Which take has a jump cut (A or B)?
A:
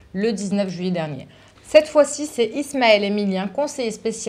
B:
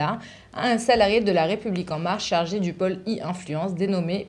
A